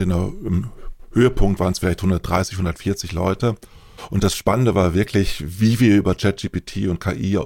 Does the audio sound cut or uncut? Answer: uncut